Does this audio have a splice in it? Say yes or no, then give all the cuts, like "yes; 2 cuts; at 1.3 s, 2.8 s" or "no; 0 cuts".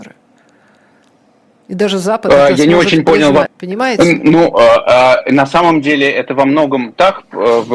yes; 1 cut; at 3.5 s